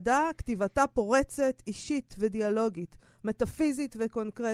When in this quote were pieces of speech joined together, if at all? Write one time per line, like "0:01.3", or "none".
none